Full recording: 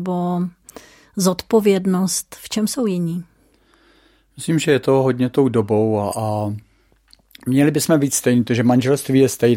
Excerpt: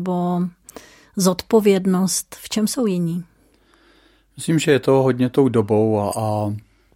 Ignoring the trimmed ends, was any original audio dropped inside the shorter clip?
no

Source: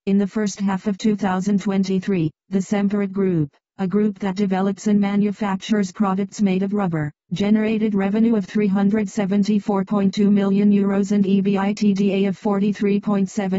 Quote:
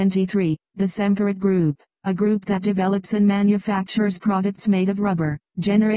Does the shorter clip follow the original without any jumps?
yes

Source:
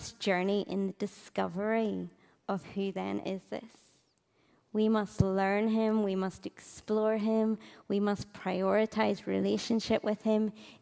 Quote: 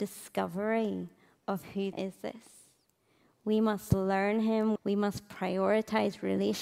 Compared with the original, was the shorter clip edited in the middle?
yes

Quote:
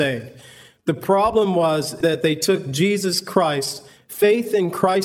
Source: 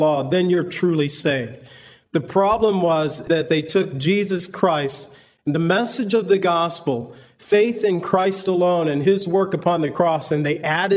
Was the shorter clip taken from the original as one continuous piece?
no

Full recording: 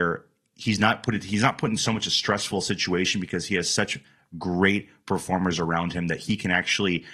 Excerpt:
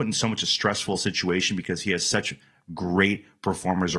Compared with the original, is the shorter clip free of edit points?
yes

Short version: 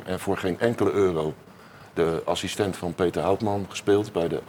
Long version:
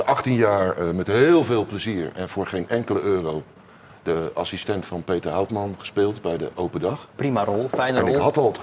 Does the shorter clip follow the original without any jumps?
yes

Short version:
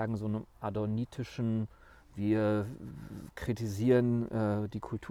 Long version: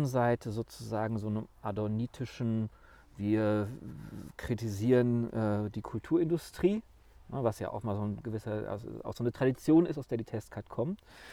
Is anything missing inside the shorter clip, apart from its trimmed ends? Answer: no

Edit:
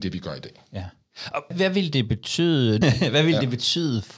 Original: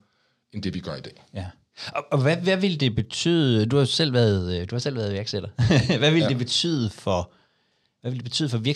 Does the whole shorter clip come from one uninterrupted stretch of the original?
no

